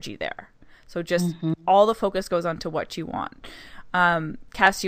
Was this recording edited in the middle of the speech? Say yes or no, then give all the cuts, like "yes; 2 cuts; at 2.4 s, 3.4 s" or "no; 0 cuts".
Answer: no; 0 cuts